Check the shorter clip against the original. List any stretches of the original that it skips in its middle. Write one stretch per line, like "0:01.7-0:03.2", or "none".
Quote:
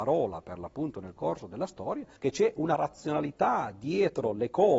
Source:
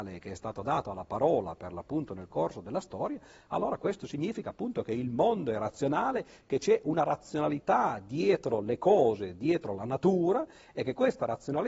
0:03.3-0:06.4

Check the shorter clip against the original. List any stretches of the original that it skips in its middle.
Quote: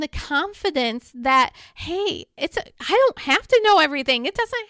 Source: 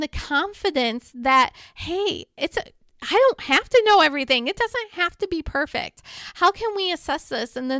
0:02.7-0:02.9

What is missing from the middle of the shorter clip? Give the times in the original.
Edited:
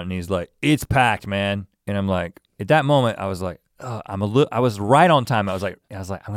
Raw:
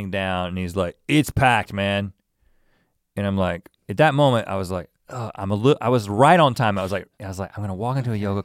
0:02.2-0:03.1

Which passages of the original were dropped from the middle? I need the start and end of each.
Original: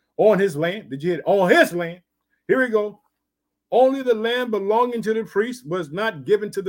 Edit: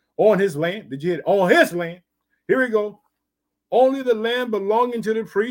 none

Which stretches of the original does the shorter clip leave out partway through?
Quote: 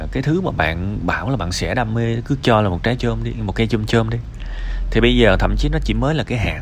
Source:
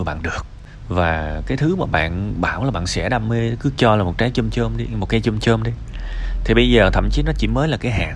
0:04.3-0:04.5

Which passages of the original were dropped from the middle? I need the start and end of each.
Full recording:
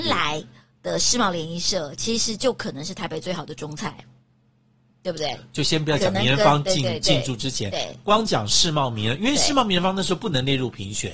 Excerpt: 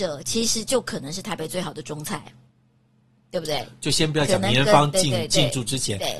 none

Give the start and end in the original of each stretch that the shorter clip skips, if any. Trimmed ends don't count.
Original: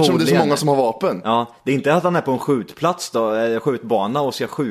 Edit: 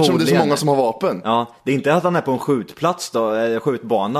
none

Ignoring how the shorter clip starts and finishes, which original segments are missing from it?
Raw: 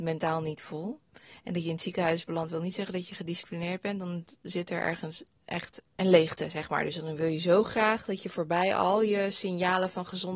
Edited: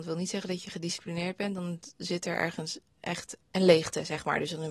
none

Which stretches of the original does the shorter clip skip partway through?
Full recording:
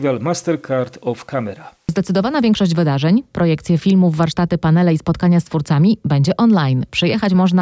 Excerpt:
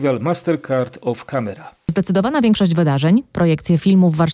none

